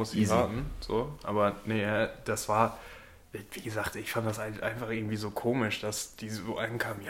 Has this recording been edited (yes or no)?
no